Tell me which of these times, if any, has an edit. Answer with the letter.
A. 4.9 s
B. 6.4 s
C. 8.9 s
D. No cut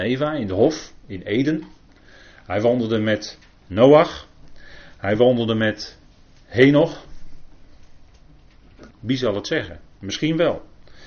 C